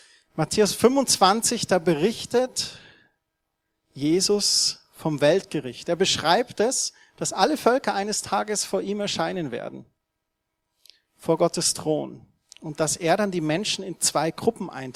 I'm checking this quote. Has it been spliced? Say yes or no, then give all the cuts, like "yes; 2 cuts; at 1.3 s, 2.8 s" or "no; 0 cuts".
no; 0 cuts